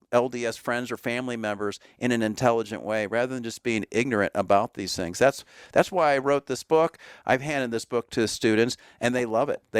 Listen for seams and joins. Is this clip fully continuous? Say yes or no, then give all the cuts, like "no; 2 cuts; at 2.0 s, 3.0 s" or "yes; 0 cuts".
no; 1 cut; at 7.2 s